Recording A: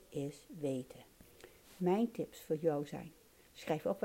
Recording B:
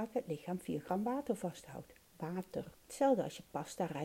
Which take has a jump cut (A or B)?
B